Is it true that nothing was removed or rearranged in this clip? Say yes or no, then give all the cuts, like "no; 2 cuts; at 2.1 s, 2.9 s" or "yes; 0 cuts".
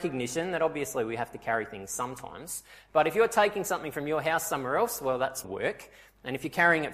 no; 1 cut; at 5.4 s